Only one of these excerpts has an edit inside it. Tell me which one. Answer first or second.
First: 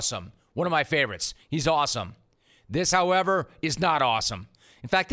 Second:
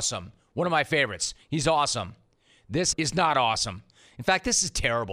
second